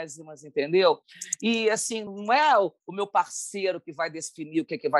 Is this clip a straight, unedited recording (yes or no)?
yes